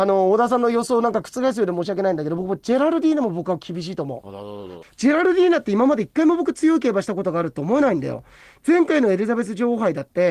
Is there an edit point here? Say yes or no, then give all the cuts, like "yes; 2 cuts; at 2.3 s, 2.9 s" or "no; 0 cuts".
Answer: yes; 1 cut; at 4.8 s